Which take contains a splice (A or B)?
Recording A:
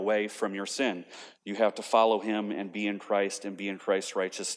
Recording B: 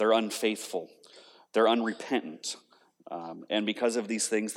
A